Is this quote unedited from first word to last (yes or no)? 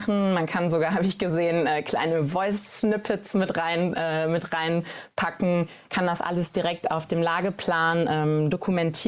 yes